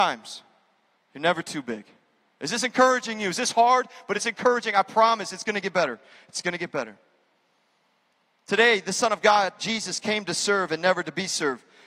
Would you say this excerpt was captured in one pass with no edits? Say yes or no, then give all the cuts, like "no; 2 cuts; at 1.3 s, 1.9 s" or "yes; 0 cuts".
no; 1 cut; at 1.0 s